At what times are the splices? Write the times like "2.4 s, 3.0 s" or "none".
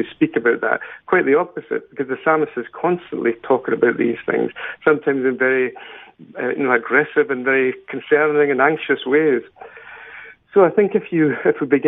none